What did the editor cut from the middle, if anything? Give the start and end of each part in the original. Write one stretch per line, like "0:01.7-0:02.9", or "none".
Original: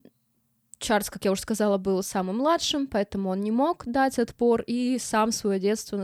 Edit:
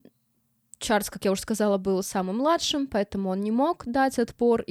none